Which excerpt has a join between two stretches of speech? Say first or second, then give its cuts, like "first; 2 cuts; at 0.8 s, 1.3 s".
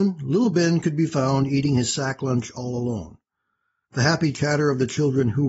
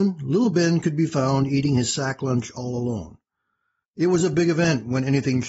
second; 1 cut; at 3.8 s